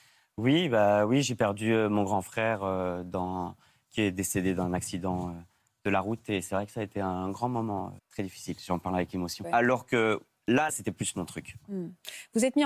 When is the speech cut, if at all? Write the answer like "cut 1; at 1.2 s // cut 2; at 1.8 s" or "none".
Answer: cut 1; at 8.0 s // cut 2; at 9.4 s // cut 3; at 10.7 s